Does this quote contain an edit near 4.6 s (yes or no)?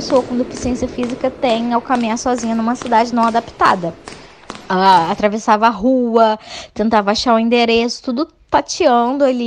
no